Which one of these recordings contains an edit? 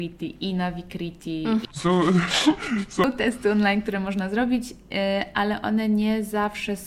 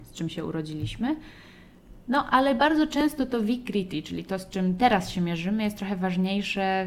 first; 1 cut; at 1.6 s

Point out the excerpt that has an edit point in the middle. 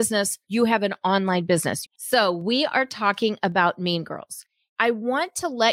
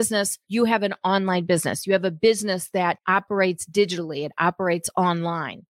first; 1 cut; at 1.8 s

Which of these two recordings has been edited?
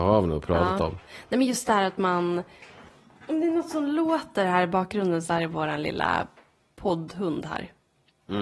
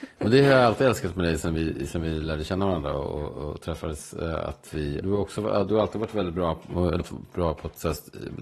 second; 2 cuts; at 5.0 s, 7.0 s

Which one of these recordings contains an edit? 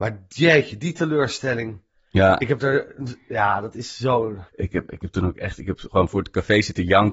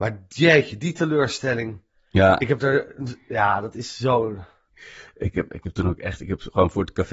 first; 1 cut; at 4.5 s

